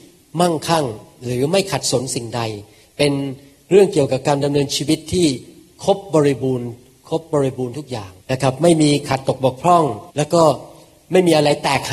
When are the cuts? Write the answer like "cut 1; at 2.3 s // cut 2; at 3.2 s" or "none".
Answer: cut 1; at 8.2 s // cut 2; at 10.1 s

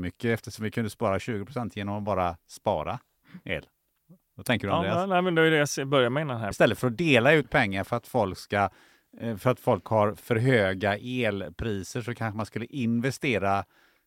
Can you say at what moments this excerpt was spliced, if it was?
cut 1; at 6.5 s

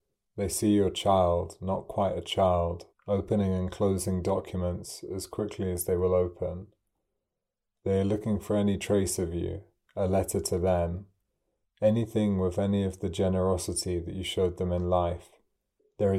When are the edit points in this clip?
cut 1; at 2.9 s

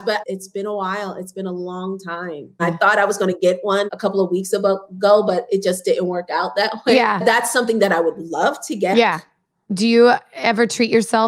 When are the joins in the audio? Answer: cut 1; at 2.6 s // cut 2; at 3.9 s // cut 3; at 8.9 s

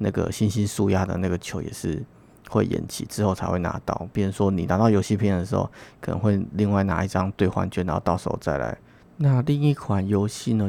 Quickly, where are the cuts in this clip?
cut 1; at 9.0 s

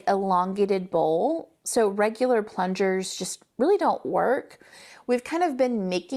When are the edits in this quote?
none

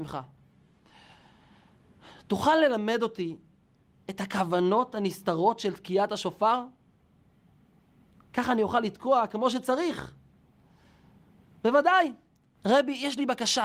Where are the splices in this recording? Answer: cut 1; at 12.6 s

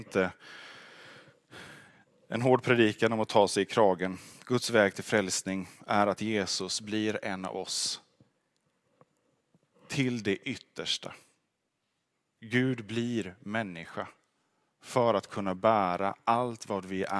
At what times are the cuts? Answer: none

